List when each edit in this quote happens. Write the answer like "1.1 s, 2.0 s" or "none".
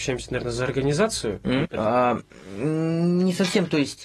1.6 s